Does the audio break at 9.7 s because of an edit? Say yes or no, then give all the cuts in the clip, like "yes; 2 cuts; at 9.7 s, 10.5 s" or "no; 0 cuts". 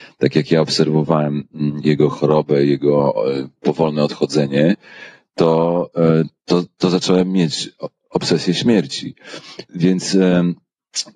yes; 1 cut; at 9.7 s